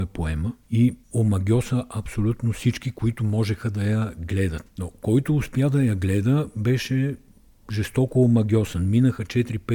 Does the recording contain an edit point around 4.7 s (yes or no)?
no